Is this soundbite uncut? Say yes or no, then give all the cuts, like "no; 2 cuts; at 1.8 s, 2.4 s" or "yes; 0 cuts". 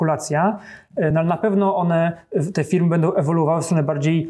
yes; 0 cuts